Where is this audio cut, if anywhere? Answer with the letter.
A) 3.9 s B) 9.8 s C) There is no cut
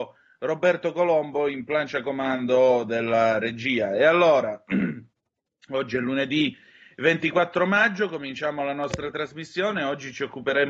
C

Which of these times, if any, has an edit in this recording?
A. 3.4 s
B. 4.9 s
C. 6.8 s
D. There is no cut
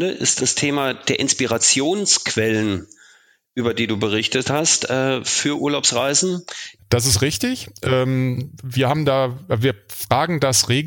C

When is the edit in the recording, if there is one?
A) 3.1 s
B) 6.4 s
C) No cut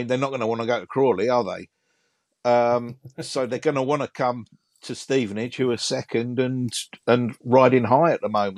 C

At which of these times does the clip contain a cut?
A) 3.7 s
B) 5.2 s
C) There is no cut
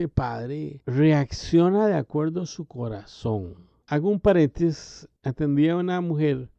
C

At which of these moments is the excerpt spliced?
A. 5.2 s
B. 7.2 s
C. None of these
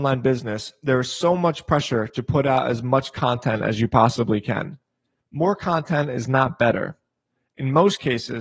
A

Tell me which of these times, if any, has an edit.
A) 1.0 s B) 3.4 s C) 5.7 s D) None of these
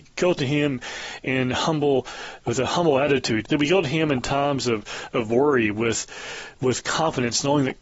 B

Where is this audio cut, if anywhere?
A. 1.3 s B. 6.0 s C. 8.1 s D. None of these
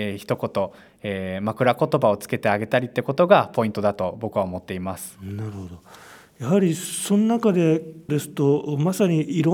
C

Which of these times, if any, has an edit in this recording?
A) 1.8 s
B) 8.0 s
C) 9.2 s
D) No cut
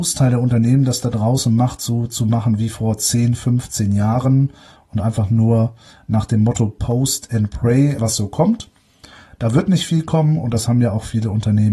B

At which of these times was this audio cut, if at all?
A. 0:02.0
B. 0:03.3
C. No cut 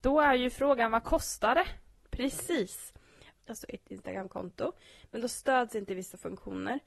B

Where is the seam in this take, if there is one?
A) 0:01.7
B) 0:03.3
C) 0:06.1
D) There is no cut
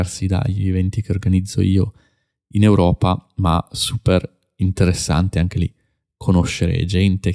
D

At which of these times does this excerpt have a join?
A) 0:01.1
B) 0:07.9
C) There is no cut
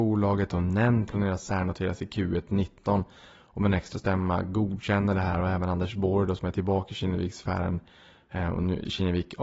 A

